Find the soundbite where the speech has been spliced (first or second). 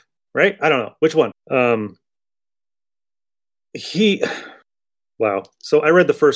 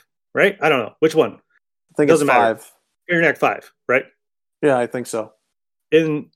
first